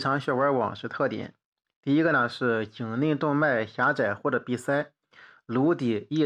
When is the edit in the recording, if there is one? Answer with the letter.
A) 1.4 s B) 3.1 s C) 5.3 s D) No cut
D